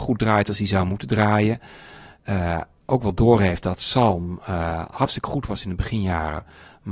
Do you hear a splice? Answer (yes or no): no